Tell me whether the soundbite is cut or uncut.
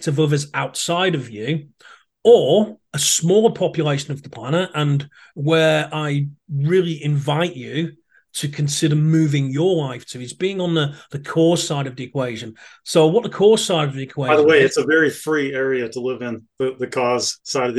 uncut